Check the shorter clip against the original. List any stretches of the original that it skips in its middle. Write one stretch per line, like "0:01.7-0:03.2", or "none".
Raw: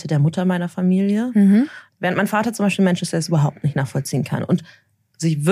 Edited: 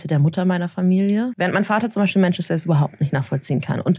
0:01.3-0:02.0